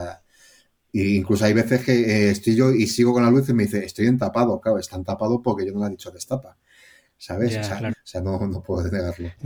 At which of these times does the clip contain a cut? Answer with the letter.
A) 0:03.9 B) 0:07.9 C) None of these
B